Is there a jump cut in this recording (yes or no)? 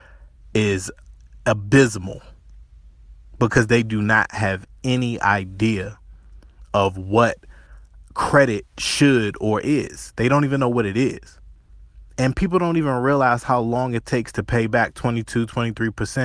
yes